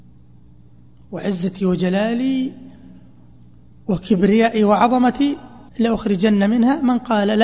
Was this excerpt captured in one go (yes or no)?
no